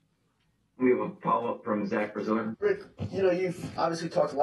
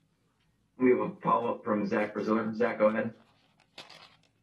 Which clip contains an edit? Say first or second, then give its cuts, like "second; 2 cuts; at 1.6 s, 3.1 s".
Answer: first; 1 cut; at 2.5 s